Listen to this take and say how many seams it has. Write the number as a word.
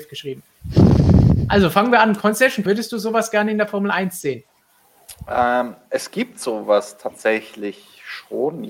one